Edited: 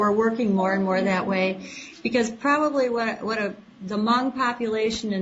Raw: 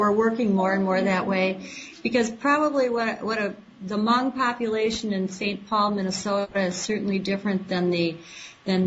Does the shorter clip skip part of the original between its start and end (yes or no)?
no